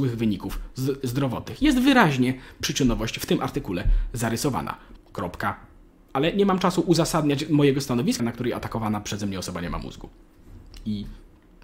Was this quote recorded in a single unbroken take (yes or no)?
no